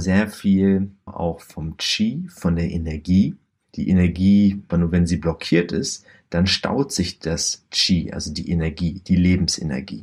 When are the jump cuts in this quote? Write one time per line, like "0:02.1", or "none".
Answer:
0:01.1
0:04.7

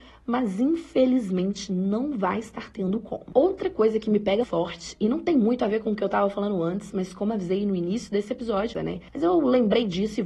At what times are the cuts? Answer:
0:04.4
0:08.7

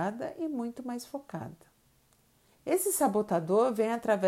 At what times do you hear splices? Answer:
0:02.5

